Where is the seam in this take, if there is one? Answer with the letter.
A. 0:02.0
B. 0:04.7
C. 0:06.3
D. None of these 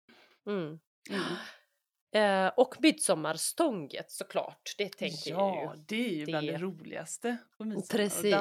D